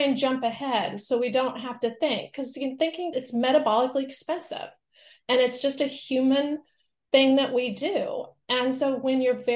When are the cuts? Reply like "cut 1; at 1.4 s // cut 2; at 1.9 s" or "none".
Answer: none